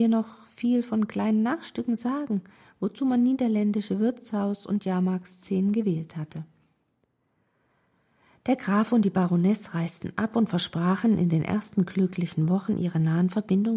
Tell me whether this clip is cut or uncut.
uncut